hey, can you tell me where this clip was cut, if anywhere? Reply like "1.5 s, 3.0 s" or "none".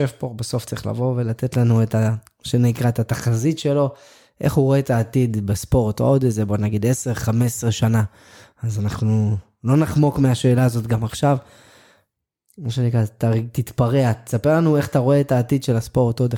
none